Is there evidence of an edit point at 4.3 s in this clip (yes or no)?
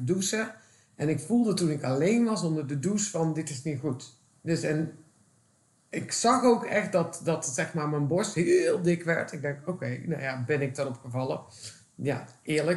yes